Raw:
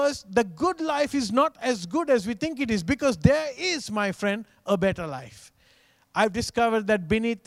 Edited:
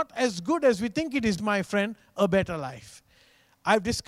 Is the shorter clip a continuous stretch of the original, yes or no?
no